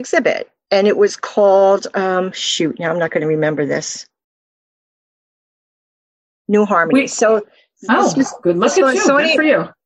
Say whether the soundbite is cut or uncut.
uncut